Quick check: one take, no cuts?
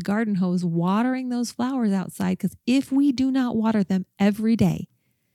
yes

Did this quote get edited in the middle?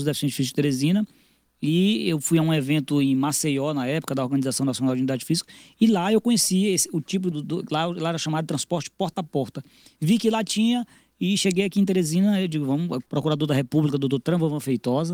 yes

